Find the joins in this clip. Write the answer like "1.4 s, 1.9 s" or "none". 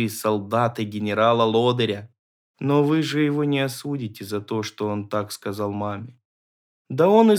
2.4 s